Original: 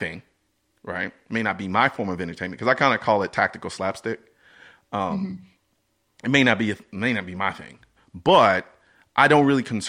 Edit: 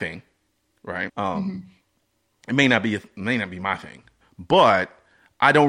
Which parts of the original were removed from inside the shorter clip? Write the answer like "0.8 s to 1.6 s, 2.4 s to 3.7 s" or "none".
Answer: 1.1 s to 4.8 s